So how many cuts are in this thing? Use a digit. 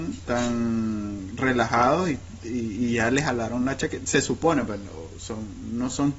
0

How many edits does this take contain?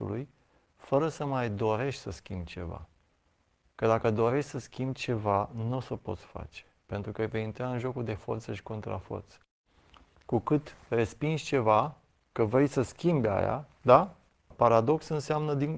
1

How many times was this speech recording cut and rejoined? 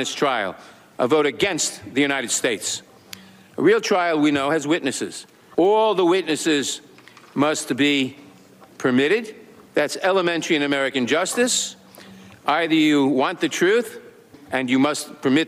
1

